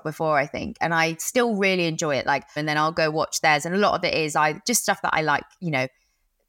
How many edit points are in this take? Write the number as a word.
one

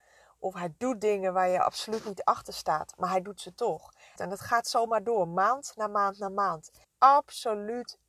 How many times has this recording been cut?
two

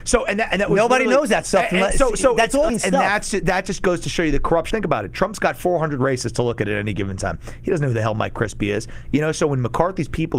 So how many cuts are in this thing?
two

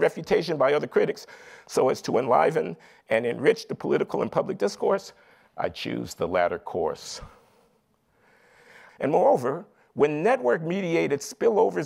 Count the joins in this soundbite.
one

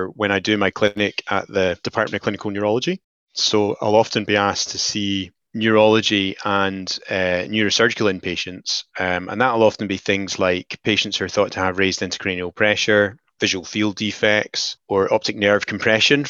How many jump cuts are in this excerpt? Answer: zero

